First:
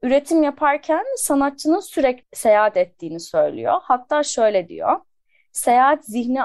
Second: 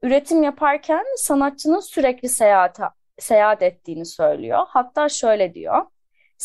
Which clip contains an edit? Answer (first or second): first